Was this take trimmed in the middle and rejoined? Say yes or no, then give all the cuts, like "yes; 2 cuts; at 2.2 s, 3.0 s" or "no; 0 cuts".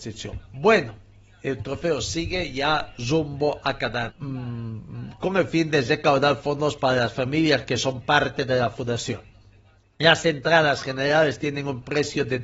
yes; 1 cut; at 4.1 s